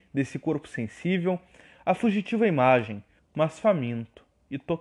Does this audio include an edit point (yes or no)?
yes